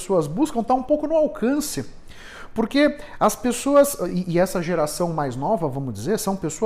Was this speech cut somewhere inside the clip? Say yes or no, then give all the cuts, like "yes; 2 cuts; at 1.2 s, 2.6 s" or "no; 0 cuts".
no; 0 cuts